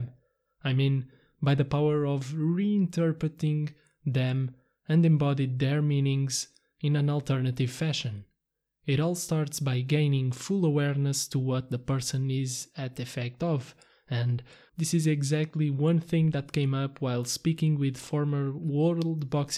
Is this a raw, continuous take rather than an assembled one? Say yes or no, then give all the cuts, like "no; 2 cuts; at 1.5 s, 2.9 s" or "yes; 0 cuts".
no; 1 cut; at 14.7 s